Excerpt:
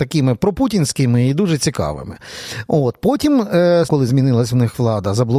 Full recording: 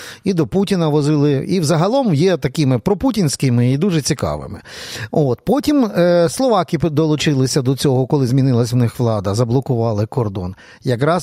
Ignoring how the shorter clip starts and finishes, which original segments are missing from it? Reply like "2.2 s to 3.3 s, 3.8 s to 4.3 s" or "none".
6.3 s to 8.1 s

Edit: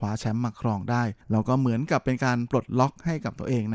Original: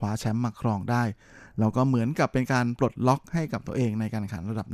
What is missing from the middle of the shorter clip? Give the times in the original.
1.2 s to 1.5 s

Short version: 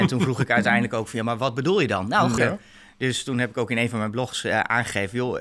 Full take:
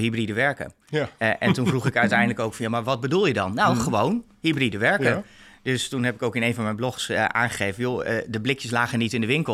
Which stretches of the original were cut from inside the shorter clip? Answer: 3.8 s to 5.0 s

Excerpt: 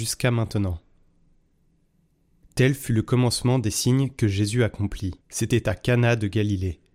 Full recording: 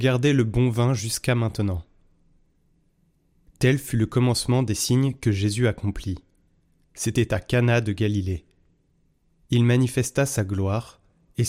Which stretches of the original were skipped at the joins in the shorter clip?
6.2 s to 6.9 s

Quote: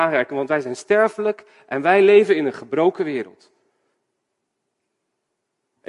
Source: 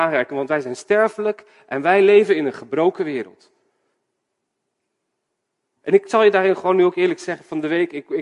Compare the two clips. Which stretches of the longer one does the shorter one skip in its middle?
none

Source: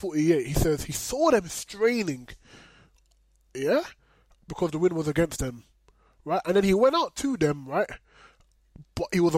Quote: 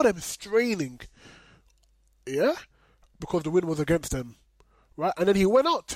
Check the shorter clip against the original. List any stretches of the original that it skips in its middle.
none

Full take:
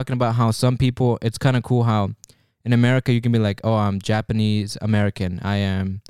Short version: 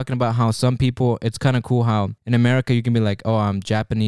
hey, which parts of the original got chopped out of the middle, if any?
2.2 s to 2.6 s

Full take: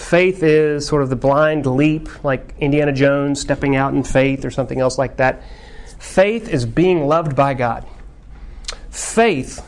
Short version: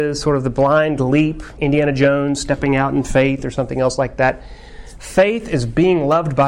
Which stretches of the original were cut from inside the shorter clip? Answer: 2.2 s to 2.6 s

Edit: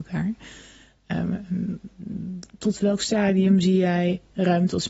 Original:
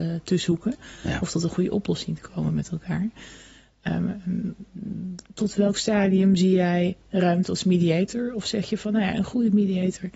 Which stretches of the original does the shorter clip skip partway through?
none

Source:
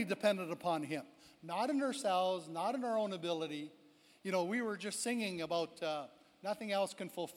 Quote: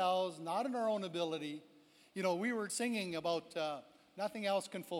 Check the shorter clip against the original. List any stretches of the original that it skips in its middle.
4.8 s to 5.0 s

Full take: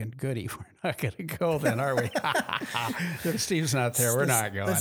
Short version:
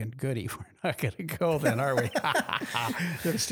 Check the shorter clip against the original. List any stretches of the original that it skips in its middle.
none

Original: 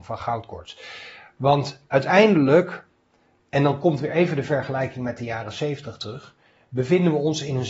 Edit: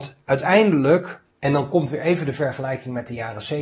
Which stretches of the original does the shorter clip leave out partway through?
2.9 s to 3.4 s

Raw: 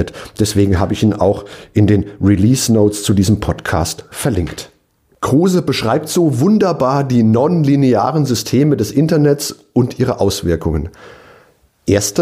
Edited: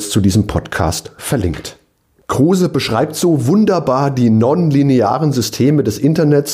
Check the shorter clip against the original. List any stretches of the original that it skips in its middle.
none

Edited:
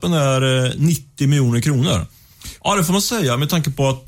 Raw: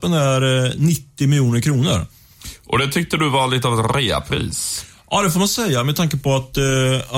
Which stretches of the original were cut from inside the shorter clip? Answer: 2.6 s to 5.0 s

